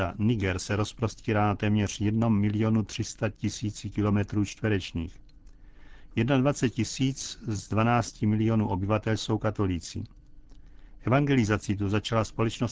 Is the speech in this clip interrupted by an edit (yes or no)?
no